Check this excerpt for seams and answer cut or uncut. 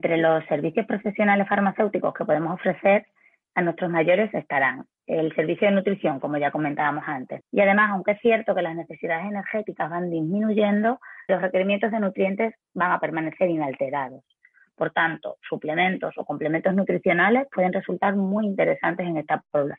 cut